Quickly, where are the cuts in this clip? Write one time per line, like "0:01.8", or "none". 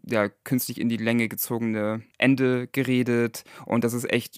0:02.1